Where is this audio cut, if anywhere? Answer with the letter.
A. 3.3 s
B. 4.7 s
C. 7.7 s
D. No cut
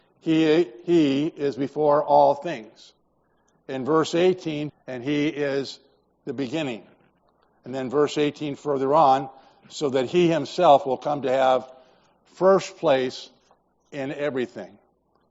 B